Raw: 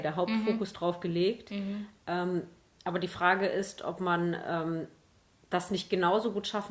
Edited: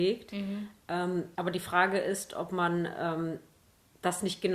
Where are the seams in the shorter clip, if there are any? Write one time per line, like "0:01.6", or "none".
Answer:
0:01.3